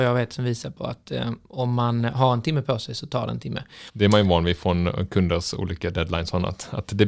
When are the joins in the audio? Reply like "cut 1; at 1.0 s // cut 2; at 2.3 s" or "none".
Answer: cut 1; at 3.9 s